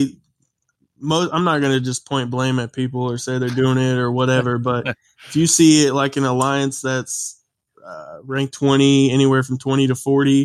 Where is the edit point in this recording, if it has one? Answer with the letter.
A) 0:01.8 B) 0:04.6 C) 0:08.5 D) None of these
C